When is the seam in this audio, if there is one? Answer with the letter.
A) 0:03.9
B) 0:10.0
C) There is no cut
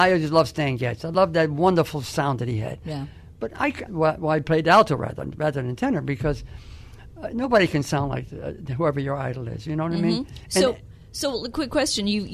A